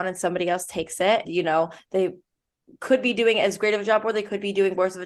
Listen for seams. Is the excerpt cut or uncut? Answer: cut